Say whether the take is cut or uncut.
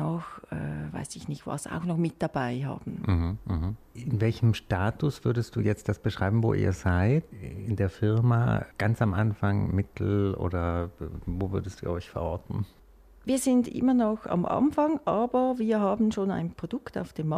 uncut